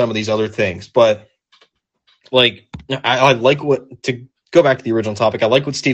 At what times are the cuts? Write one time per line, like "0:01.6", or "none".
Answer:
none

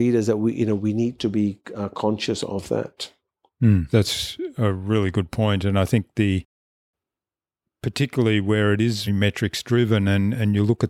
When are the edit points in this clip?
0:03.9
0:09.1

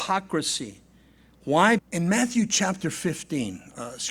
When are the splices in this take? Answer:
0:01.8

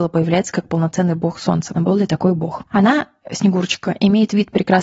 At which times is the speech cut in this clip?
0:01.7

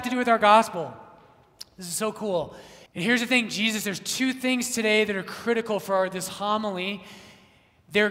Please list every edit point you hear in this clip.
0:02.9

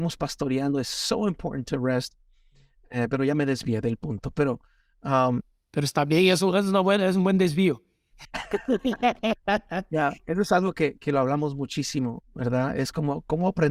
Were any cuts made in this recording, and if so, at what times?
none

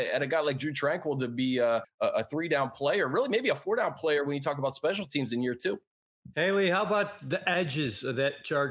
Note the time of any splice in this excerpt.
0:01.8

